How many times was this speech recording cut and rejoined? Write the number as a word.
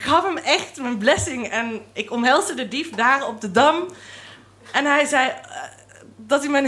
zero